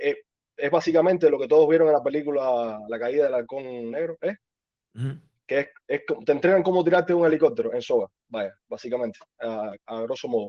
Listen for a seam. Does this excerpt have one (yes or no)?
no